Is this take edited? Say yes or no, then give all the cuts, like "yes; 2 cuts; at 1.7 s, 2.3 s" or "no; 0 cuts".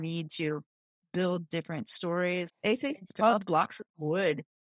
yes; 1 cut; at 2.5 s